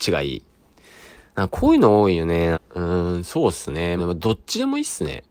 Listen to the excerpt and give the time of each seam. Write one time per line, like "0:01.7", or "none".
0:02.5
0:04.0